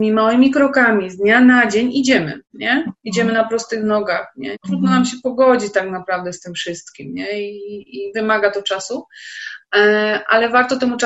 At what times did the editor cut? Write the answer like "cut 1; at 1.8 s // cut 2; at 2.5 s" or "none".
cut 1; at 2.4 s // cut 2; at 4.5 s